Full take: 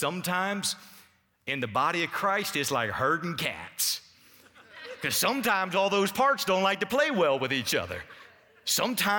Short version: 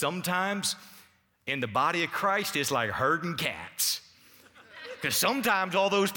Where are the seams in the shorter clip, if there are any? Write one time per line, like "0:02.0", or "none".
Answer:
none